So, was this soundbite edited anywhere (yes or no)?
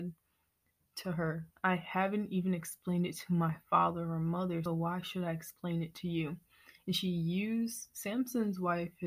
yes